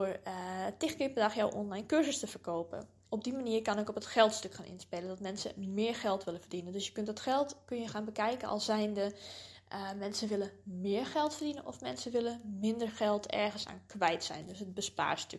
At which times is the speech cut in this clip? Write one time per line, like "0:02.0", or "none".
0:03.1